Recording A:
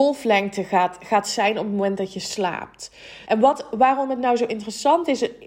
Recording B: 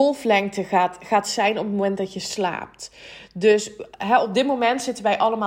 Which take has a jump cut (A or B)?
A